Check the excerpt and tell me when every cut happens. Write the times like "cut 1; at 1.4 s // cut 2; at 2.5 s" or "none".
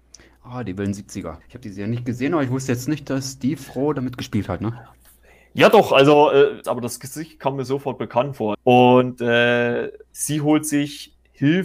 cut 1; at 1.4 s // cut 2; at 6.6 s // cut 3; at 8.5 s